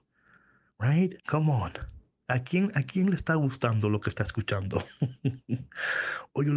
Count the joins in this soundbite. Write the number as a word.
one